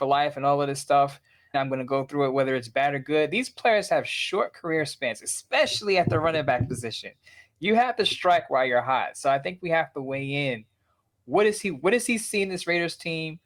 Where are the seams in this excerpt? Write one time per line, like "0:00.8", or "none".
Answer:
0:01.5

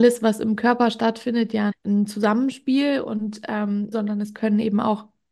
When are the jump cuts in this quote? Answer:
0:01.7
0:03.9

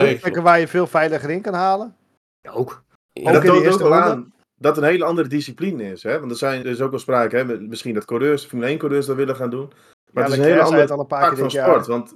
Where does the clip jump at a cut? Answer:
0:06.6

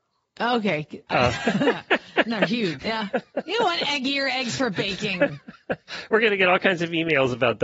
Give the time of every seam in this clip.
0:01.1
0:02.8

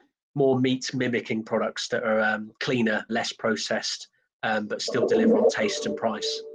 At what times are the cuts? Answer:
0:03.1

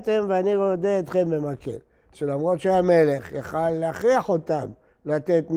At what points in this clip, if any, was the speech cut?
0:02.1

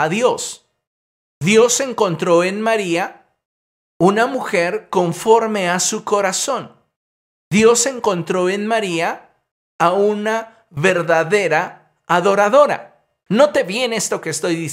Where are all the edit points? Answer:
0:13.3

